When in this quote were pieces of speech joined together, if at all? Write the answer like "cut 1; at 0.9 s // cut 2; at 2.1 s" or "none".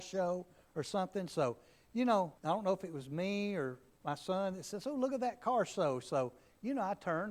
cut 1; at 2.4 s